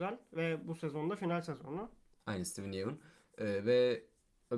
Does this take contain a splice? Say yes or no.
yes